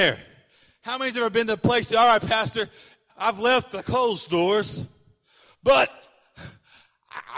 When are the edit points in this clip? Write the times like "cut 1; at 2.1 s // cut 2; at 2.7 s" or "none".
cut 1; at 3.1 s